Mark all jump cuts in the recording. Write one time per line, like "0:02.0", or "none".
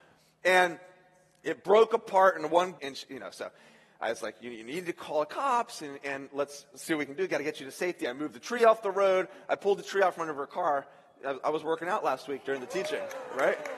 0:02.8